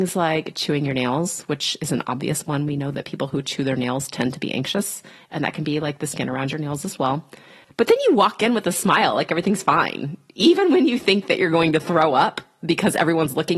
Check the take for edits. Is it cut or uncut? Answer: cut